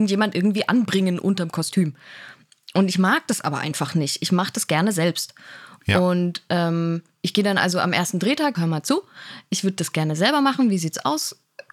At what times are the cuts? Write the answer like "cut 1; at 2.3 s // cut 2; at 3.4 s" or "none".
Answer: cut 1; at 8.5 s